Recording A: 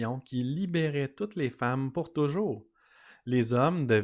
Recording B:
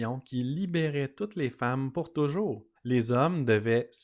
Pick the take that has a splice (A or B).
B